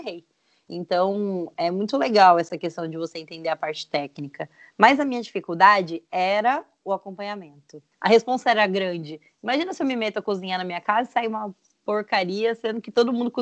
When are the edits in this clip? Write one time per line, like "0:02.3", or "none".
0:07.9